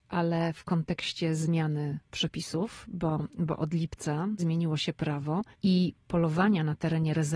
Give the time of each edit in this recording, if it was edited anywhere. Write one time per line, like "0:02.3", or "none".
0:04.4
0:05.5